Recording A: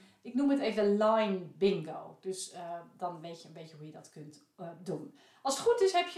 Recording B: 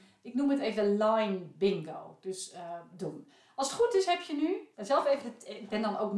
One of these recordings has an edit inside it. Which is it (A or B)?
B